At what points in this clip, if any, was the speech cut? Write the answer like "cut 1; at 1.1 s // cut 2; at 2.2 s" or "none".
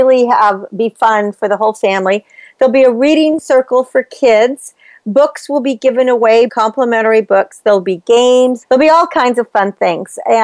cut 1; at 6.5 s // cut 2; at 8.6 s